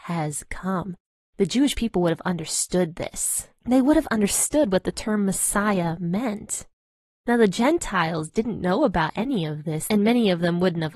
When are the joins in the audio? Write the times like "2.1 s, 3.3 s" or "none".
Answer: none